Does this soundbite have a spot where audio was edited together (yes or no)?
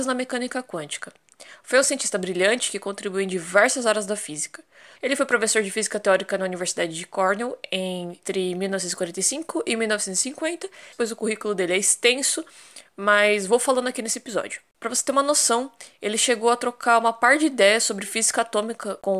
yes